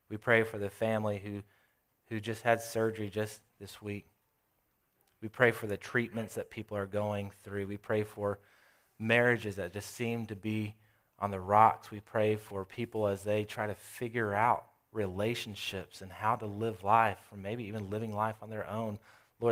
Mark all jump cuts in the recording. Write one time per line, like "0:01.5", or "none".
0:03.5